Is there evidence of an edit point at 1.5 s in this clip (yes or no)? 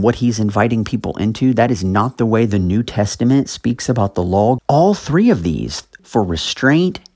no